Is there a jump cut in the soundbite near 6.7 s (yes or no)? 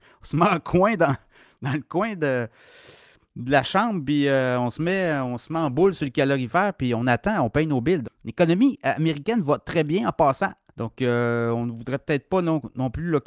no